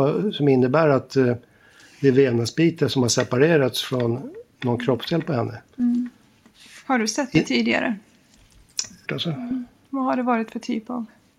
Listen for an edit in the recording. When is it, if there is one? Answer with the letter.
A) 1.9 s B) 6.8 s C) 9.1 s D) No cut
C